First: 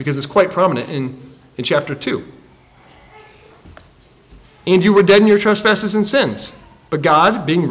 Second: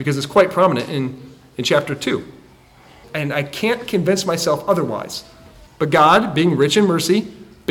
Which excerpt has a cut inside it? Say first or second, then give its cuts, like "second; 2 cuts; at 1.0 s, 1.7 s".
second; 2 cuts; at 3.0 s, 5.7 s